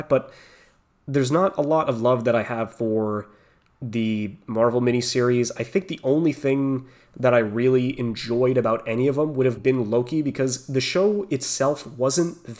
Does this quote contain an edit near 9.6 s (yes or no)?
yes